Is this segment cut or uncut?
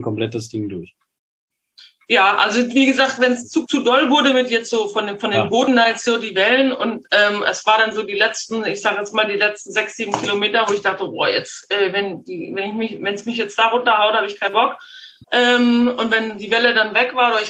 cut